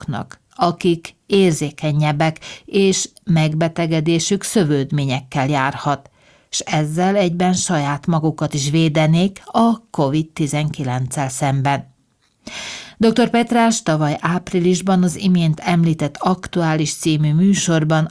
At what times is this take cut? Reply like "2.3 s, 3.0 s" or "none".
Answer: none